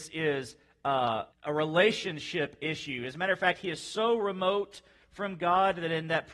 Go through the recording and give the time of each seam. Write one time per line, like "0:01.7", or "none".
0:01.3